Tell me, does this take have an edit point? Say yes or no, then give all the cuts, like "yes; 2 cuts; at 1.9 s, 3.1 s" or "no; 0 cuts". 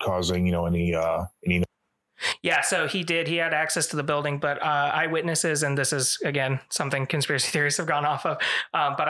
no; 0 cuts